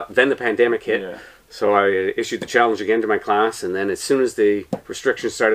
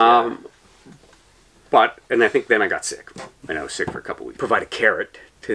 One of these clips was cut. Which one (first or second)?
second